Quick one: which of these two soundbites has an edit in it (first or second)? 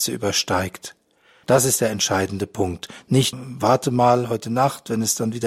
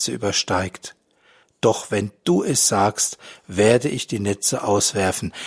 first